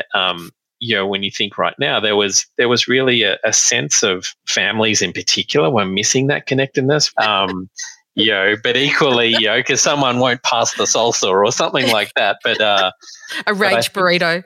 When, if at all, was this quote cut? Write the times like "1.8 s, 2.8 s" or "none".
7.1 s